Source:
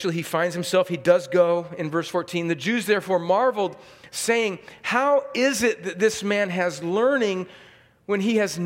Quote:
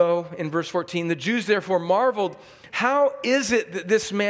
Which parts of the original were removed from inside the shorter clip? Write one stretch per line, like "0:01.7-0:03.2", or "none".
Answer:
0:04.1-0:04.8